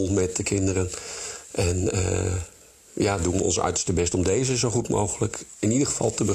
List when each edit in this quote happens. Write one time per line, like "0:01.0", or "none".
none